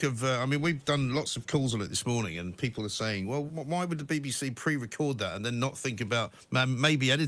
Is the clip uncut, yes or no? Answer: no